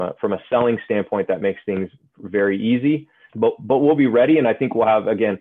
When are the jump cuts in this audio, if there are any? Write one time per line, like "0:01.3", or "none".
0:03.3